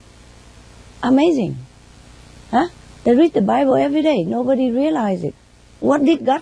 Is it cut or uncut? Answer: uncut